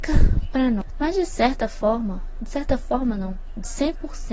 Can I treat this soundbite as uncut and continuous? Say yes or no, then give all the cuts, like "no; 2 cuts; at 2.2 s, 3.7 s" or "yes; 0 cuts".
no; 1 cut; at 0.9 s